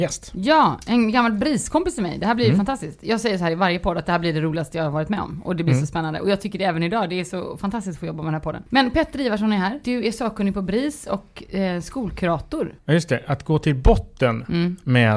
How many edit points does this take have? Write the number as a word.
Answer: three